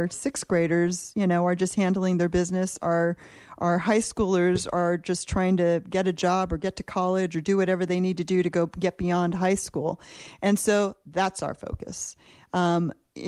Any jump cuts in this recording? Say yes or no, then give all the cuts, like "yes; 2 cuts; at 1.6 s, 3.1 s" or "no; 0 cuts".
no; 0 cuts